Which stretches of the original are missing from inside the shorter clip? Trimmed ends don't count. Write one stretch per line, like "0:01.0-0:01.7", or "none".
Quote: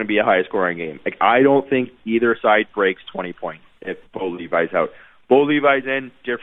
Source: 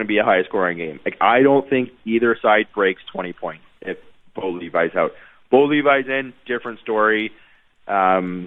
0:04.1-0:04.3